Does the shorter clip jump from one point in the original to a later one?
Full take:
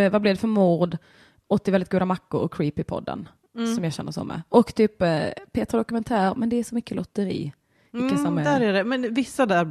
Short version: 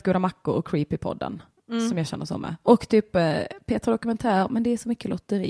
no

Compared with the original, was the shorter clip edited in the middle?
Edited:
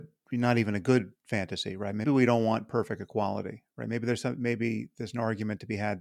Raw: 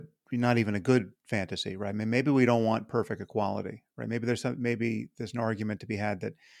yes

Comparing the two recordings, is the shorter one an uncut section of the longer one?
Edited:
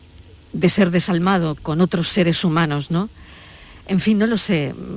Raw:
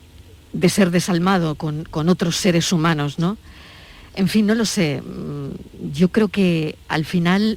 no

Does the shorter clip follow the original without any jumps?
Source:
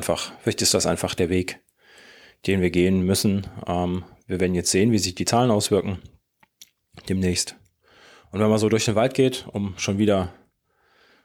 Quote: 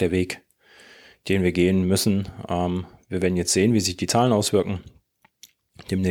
yes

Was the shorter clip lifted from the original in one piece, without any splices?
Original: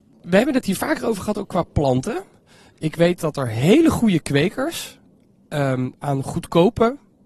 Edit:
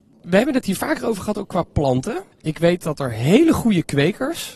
no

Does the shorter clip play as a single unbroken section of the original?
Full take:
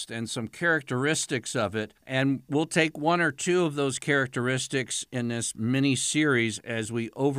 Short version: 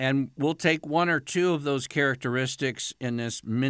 yes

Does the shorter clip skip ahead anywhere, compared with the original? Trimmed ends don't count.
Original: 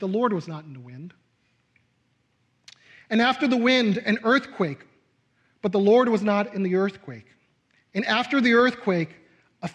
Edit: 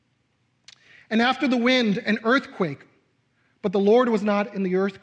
no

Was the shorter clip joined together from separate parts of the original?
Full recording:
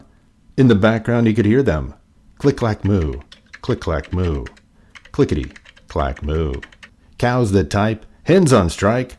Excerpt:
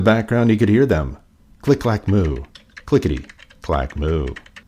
yes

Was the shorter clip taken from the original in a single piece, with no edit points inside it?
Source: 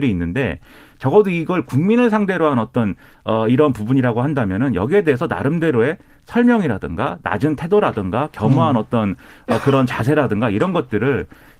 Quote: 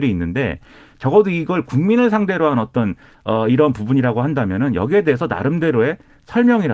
yes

